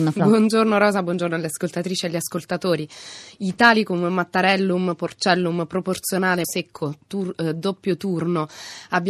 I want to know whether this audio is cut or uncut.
cut